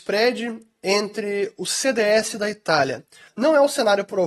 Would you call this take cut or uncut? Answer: cut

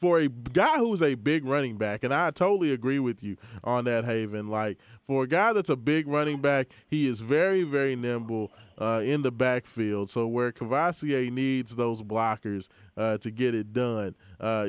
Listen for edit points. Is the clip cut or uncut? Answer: uncut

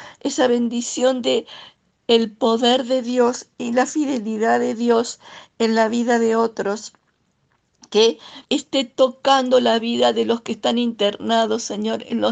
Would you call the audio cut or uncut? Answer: cut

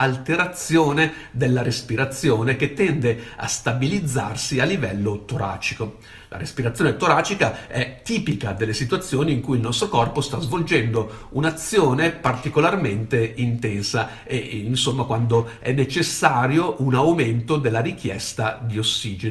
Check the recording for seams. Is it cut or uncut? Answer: uncut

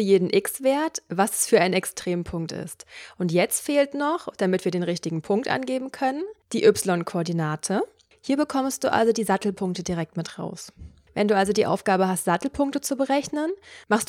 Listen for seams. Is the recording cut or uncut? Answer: cut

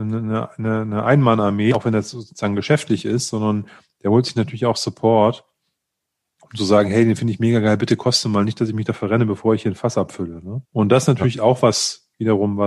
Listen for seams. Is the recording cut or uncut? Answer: cut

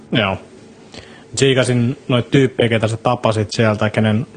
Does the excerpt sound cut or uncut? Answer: uncut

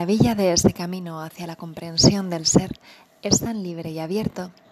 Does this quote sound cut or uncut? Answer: uncut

